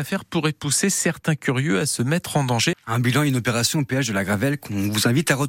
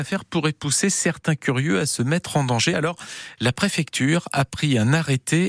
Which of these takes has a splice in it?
first; 1 cut; at 2.7 s

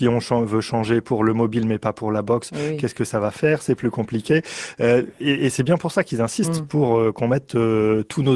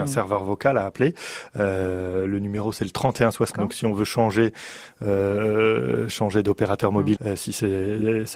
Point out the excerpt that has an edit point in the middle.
second; 2 cuts; at 3.5 s, 7.2 s

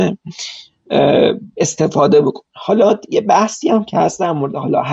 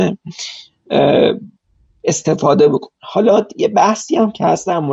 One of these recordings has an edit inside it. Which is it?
first; 1 cut; at 1.5 s

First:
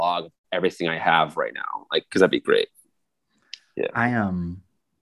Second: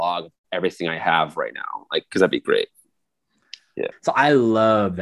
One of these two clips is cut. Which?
second; 1 cut; at 3.9 s

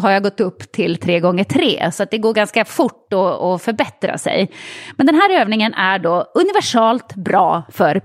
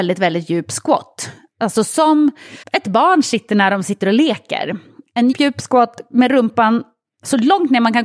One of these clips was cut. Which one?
second; 2 cuts; at 2.6 s, 5.3 s

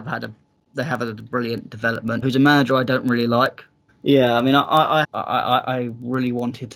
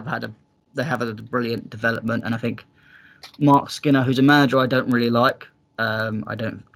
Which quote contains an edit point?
first; 3 cuts; at 2.2 s, 3.9 s, 5.0 s

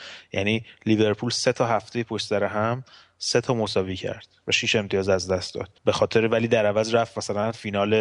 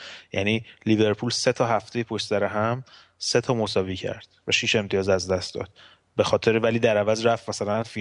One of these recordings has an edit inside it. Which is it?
first; 1 cut; at 5.8 s

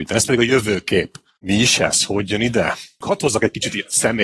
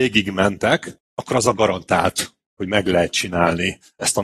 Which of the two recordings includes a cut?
first; 1 cut; at 3.0 s

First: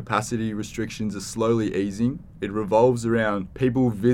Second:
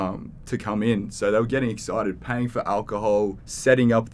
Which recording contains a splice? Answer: first; 1 cut; at 2.3 s

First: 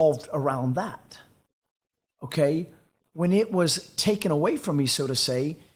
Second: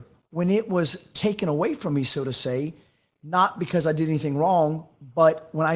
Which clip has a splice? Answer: first; 1 cut; at 3.0 s

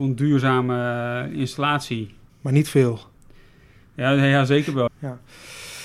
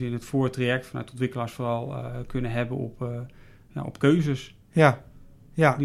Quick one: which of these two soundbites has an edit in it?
first; 2 cuts; at 2.3 s, 4.9 s

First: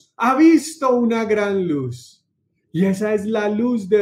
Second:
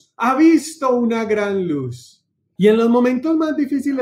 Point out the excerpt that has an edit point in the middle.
second; 1 cut; at 2.6 s

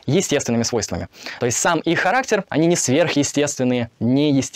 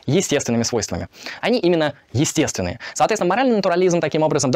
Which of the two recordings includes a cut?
second; 2 cuts; at 1.4 s, 2.9 s

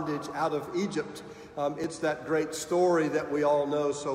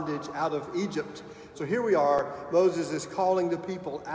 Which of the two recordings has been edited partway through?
second; 1 cut; at 1.5 s

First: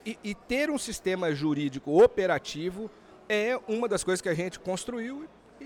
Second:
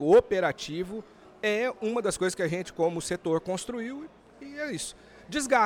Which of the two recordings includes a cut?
first; 1 cut; at 4.6 s

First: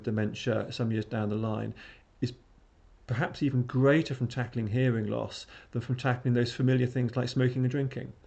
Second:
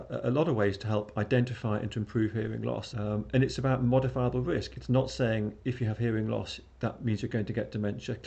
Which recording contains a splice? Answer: second; 1 cut; at 2.9 s

